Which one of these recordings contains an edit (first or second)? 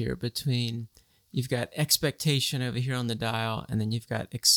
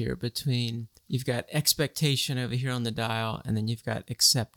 second